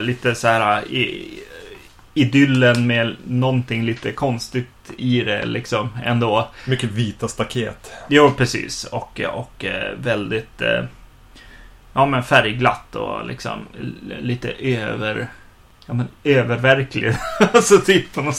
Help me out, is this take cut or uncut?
uncut